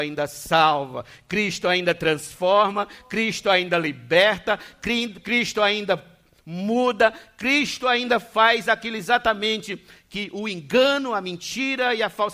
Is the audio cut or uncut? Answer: uncut